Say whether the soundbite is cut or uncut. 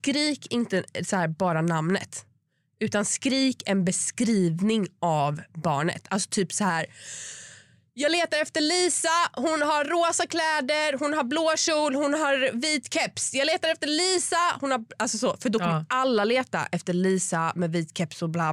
uncut